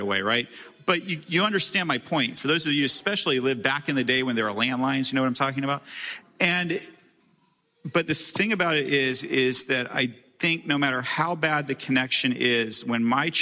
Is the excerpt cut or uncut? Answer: uncut